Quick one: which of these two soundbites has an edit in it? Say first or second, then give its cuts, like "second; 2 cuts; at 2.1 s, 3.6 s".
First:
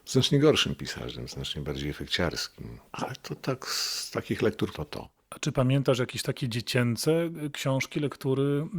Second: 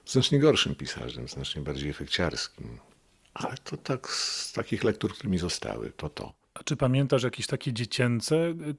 first; 2 cuts; at 2.9 s, 4.7 s